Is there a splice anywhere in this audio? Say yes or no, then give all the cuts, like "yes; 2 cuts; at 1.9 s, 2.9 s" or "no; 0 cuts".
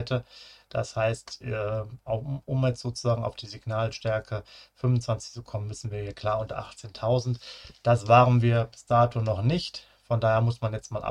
no; 0 cuts